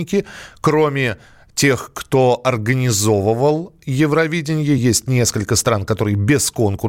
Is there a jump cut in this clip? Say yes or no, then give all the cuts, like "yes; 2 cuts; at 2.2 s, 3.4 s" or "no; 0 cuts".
no; 0 cuts